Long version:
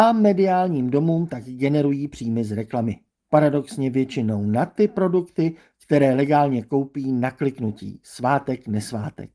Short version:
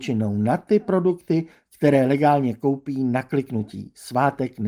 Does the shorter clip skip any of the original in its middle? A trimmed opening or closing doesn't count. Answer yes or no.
no